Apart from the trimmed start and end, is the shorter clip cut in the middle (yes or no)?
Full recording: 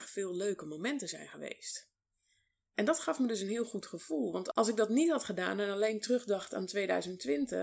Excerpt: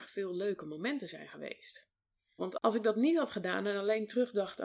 yes